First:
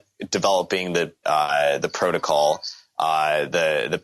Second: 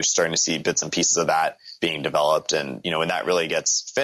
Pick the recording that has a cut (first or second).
first